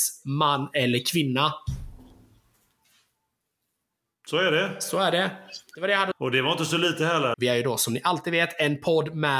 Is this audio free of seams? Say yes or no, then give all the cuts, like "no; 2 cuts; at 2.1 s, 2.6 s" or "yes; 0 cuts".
no; 2 cuts; at 6.1 s, 7.3 s